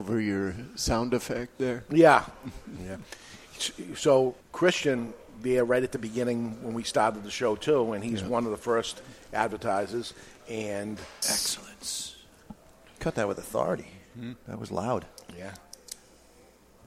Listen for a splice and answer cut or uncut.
cut